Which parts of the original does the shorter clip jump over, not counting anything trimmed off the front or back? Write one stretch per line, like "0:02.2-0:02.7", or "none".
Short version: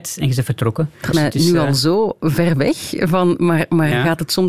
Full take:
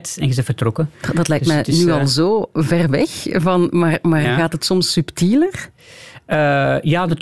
0:01.1-0:01.5